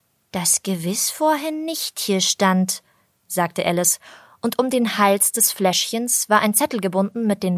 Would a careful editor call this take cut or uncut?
uncut